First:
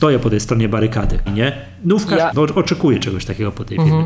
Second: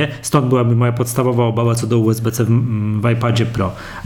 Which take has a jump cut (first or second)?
first